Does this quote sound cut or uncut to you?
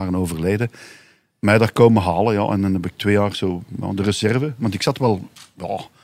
cut